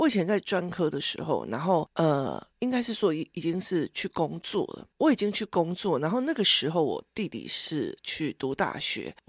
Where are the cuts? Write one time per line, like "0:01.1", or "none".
0:02.5